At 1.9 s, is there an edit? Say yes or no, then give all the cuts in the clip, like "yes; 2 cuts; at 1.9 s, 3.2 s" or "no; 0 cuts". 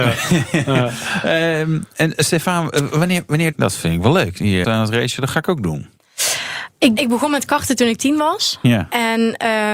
no; 3 cuts; at 3.5 s, 4.6 s, 7.0 s